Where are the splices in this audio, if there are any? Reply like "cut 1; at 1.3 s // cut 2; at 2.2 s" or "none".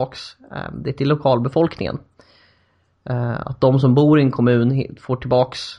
none